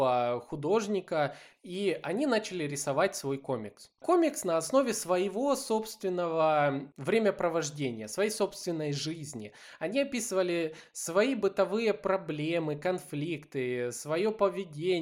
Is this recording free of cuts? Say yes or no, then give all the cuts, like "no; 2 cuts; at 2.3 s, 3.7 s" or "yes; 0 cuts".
yes; 0 cuts